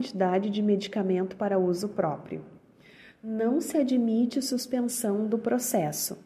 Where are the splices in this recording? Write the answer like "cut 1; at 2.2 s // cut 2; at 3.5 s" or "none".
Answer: none